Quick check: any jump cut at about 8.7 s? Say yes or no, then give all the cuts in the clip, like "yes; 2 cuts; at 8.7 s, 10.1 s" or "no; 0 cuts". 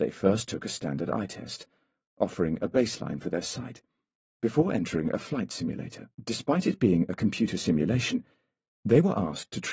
no; 1 cut; at 6.1 s